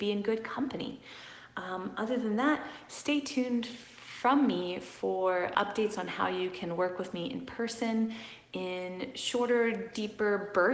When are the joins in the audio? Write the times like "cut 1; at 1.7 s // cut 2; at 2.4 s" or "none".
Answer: cut 1; at 5.5 s

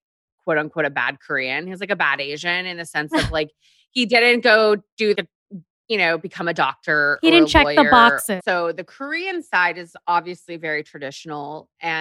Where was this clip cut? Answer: cut 1; at 5.1 s // cut 2; at 8.4 s

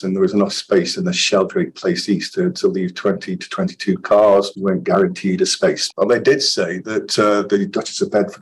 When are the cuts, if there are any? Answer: cut 1; at 5.9 s

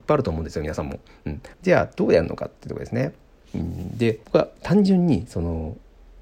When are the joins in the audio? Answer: cut 1; at 1.5 s // cut 2; at 4.2 s

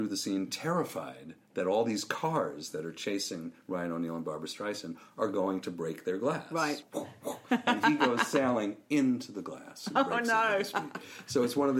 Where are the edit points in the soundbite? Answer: cut 1; at 6.8 s

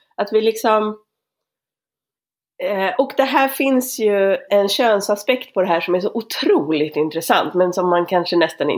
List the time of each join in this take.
cut 1; at 3.0 s // cut 2; at 4.5 s

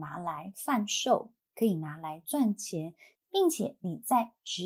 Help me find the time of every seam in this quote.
cut 1; at 3.2 s

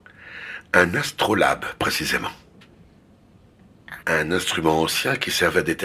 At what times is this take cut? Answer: cut 1; at 4.0 s

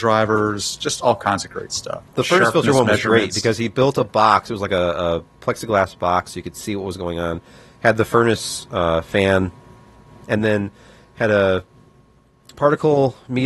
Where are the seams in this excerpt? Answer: cut 1; at 2.1 s

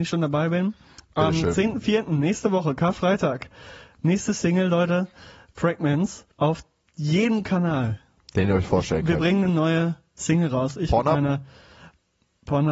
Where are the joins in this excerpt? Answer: cut 1; at 6.3 s

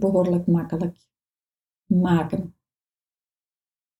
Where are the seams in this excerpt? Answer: none

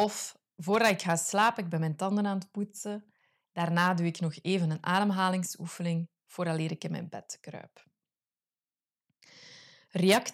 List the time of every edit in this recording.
none

